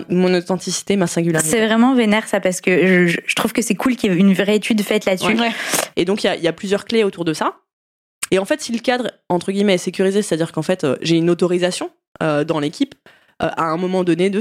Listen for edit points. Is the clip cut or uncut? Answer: cut